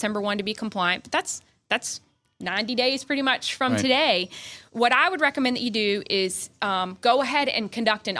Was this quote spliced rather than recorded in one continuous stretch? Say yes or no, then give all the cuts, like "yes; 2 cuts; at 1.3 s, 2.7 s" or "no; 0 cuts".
no; 0 cuts